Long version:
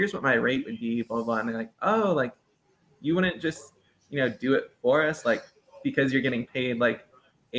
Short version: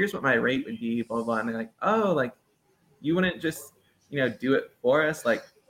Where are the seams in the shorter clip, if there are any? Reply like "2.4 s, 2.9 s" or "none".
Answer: none